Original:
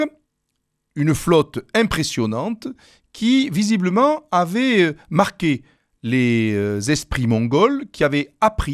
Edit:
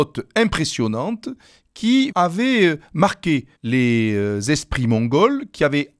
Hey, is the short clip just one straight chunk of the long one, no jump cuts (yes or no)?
no